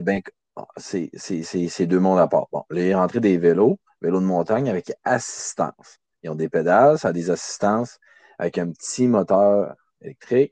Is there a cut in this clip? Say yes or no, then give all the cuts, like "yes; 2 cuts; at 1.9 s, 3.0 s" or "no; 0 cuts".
no; 0 cuts